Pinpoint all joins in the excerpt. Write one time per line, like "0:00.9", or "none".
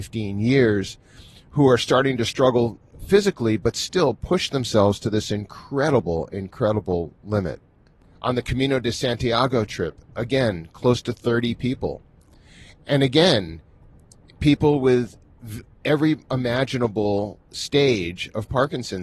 none